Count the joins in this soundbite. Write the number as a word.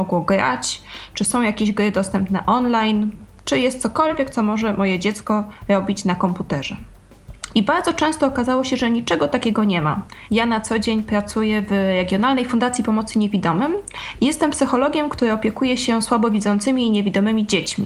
two